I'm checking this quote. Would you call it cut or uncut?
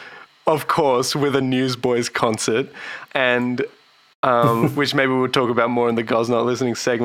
cut